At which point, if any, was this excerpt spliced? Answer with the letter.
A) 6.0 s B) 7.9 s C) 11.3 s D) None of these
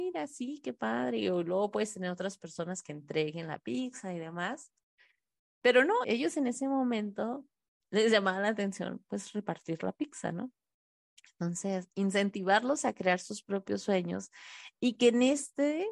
A